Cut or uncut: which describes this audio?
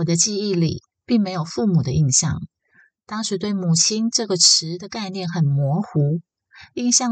uncut